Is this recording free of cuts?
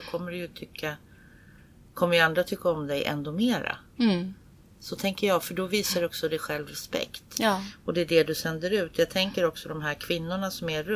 yes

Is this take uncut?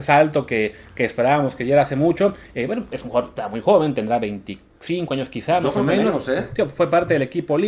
yes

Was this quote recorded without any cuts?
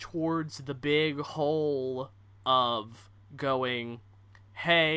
yes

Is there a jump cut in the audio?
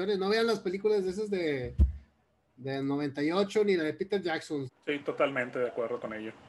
yes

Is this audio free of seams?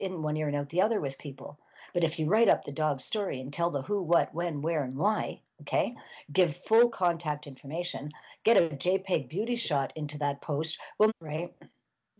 no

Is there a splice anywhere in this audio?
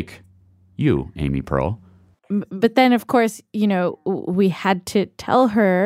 yes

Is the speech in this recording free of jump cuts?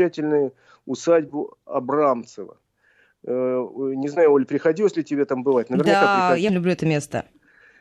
no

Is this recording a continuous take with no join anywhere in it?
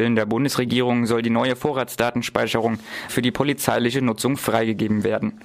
no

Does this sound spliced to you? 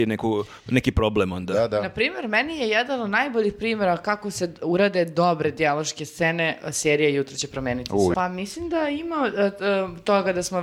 yes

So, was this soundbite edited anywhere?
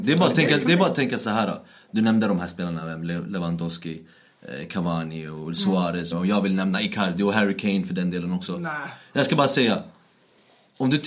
yes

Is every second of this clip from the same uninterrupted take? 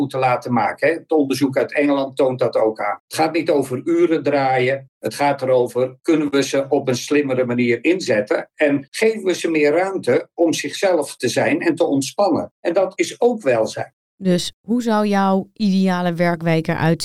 yes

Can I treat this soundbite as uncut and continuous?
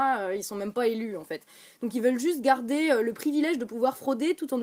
yes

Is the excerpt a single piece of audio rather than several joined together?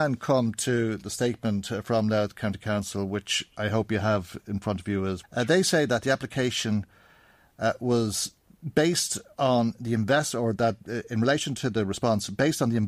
no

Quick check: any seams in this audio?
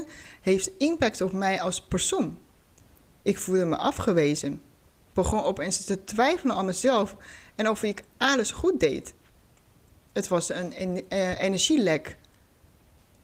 no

